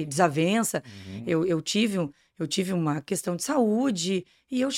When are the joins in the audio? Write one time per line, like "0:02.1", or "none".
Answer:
none